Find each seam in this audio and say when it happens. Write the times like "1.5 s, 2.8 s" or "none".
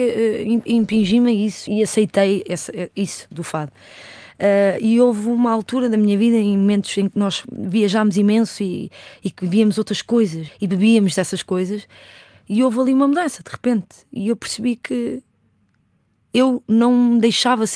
1.7 s, 10.5 s